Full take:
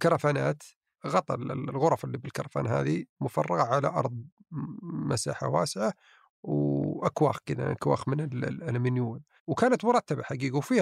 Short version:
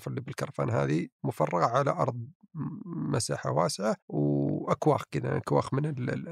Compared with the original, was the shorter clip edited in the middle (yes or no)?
yes